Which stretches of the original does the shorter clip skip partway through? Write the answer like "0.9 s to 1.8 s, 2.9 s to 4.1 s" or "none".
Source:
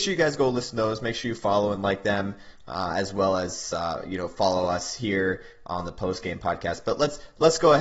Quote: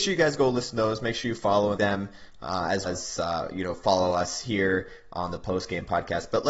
1.8 s to 2.0 s, 3.1 s to 3.4 s